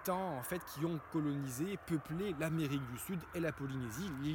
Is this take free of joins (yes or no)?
yes